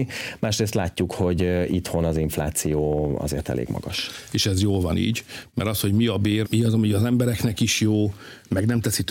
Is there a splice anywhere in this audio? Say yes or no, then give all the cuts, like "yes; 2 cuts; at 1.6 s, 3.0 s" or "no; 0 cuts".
yes; 2 cuts; at 4.3 s, 6.4 s